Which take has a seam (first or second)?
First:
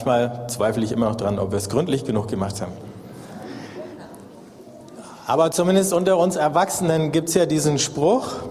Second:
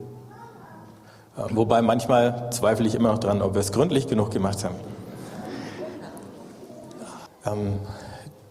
second